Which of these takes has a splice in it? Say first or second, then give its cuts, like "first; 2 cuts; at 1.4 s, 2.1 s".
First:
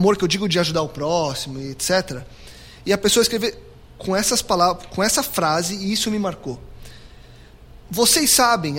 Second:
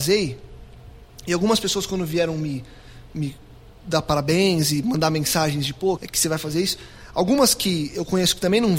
second; 1 cut; at 6.0 s